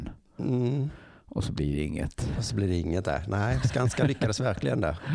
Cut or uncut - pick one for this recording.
uncut